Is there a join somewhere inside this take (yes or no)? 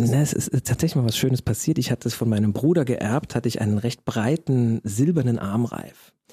no